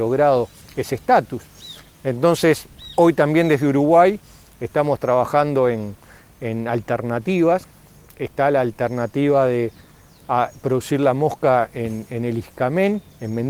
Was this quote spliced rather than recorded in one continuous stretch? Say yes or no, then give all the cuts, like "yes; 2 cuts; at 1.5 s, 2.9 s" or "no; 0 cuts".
no; 0 cuts